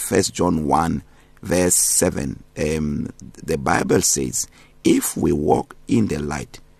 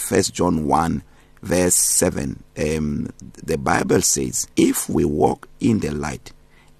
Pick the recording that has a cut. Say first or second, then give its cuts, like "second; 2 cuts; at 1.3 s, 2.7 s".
second; 1 cut; at 4.5 s